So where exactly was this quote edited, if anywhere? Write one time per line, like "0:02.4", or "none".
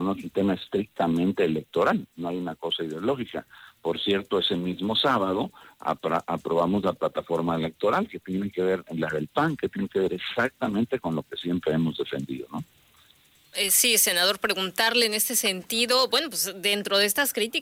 none